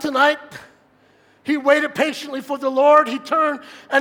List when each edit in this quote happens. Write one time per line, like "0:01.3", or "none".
none